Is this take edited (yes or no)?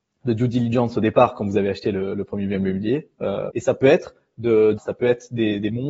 yes